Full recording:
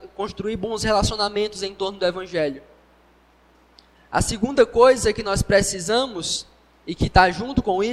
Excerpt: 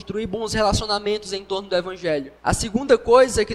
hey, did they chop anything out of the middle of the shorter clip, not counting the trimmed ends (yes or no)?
yes